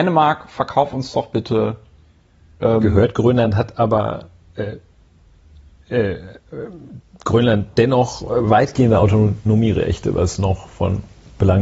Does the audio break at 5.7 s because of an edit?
no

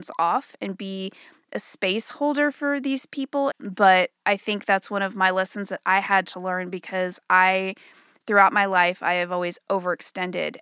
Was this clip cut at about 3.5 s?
yes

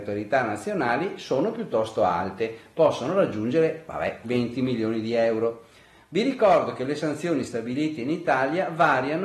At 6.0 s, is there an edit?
no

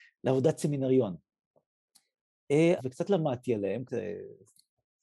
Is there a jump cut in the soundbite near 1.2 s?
no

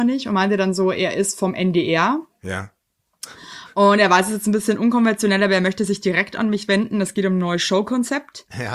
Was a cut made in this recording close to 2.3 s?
no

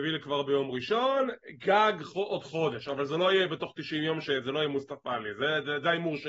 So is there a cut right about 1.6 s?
no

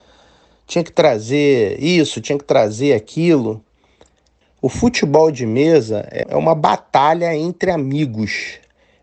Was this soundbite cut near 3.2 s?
no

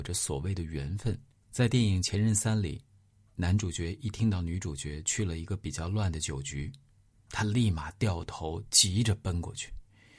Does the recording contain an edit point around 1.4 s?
yes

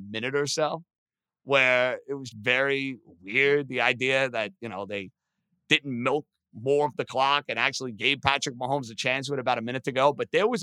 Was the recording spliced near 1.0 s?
no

